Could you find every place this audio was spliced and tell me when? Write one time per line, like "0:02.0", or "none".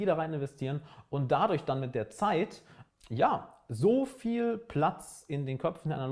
0:02.9